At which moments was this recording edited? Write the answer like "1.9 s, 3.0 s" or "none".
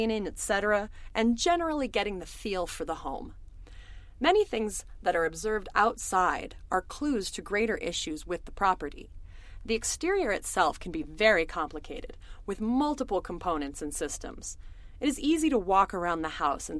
none